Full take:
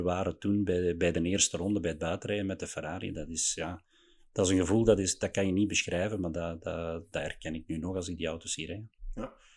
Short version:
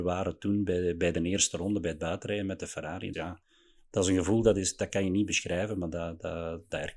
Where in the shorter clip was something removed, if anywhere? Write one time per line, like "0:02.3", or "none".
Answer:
0:03.1